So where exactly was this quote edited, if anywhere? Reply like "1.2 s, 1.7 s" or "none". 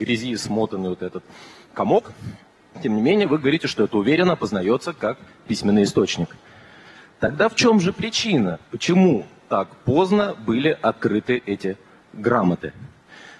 none